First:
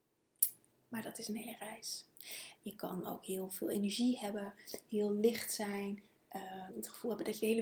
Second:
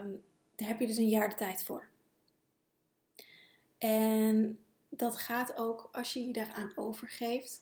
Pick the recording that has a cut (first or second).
first